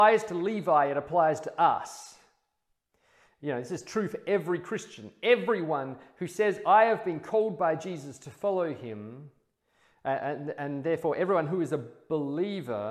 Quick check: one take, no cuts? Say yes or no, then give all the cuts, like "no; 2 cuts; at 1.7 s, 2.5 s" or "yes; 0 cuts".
yes; 0 cuts